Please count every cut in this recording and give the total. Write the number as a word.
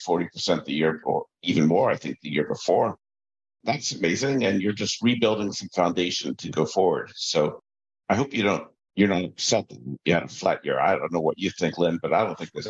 one